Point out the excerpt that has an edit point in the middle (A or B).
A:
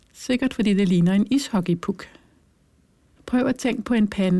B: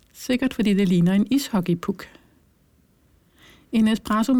A